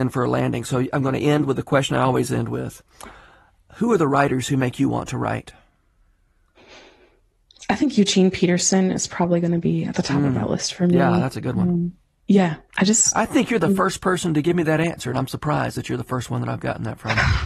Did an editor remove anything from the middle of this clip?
no; 0 cuts

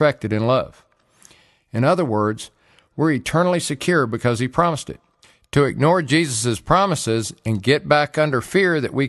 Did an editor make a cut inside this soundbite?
yes; 1 cut; at 2.9 s

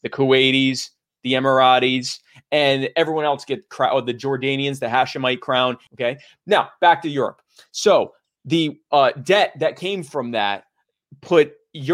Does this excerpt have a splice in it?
yes; 1 cut; at 5.9 s

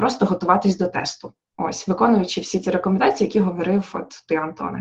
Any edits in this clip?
no; 0 cuts

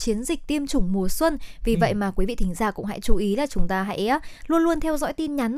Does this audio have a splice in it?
no; 0 cuts

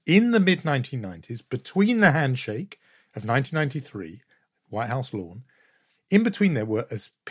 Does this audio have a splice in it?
yes; 1 cut; at 6.0 s

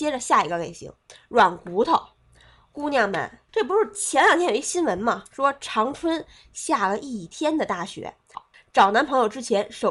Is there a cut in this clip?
yes; 2 cuts; at 3.5 s, 8.3 s

